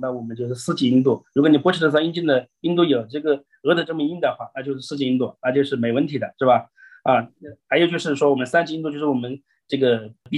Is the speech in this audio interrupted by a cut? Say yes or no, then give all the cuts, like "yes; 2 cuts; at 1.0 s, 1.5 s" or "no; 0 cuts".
no; 0 cuts